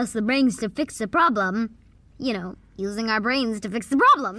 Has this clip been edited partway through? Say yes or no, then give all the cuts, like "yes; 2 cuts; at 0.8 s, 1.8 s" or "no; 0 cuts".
yes; 1 cut; at 2.1 s